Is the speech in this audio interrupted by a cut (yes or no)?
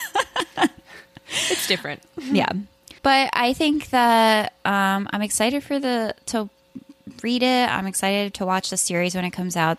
yes